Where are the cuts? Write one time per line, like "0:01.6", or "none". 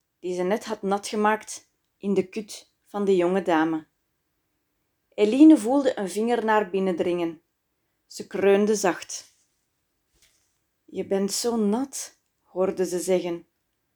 none